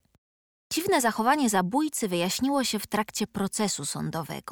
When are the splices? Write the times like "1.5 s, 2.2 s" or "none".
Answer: none